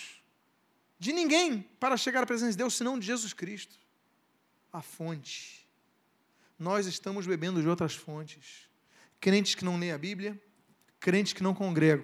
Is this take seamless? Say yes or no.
no